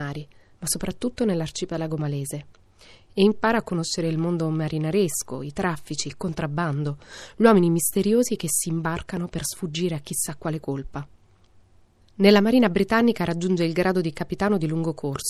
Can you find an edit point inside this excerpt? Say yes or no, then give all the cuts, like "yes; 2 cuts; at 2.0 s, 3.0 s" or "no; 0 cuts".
no; 0 cuts